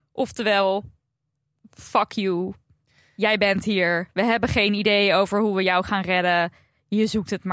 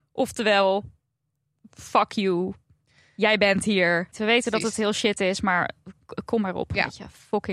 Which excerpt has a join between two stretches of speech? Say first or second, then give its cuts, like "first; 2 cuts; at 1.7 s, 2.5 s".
second; 1 cut; at 4.1 s